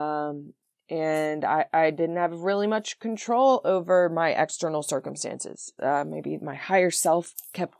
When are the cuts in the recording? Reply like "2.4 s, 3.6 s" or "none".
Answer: 5.8 s